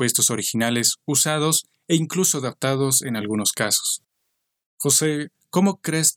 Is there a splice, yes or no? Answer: no